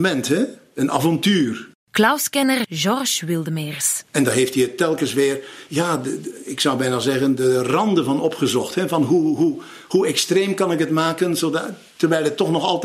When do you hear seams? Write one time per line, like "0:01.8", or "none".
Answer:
none